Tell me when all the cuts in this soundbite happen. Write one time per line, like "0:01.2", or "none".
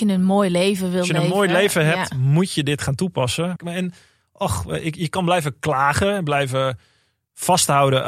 0:03.6